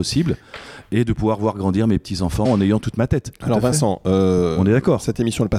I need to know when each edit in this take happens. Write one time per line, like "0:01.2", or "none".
0:02.4